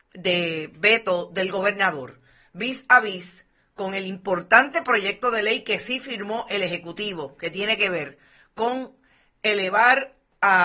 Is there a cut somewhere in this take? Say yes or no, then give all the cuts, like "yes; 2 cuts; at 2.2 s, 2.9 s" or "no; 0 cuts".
no; 0 cuts